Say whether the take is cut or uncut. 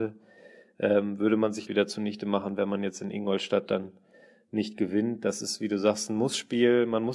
cut